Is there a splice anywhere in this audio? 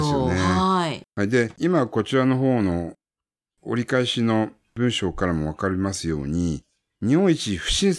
no; 0 cuts

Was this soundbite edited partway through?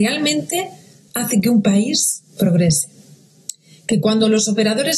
no; 0 cuts

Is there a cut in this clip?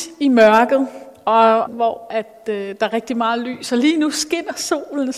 yes; 1 cut; at 1.7 s

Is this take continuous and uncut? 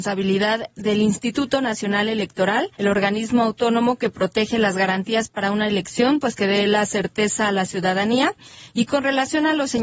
no; 1 cut; at 2.7 s

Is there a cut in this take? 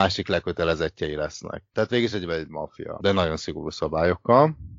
yes; 2 cuts; at 1.7 s, 3.0 s

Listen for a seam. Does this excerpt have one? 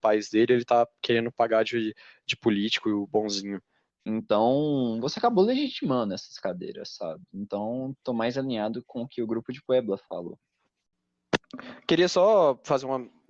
yes; 1 cut; at 3.9 s

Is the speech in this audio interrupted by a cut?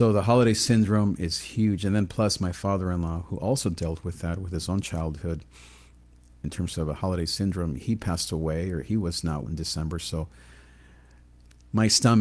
yes; 1 cut; at 9.5 s

